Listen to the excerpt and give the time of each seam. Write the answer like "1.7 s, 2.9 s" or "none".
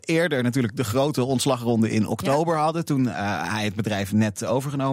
none